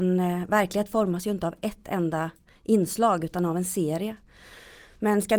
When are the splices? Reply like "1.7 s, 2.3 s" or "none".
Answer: none